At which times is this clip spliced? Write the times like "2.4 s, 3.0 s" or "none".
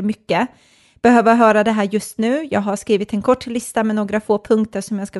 none